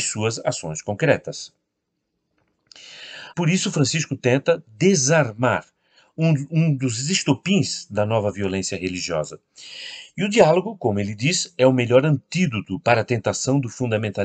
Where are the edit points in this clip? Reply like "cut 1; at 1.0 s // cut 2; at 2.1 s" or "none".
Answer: cut 1; at 3.3 s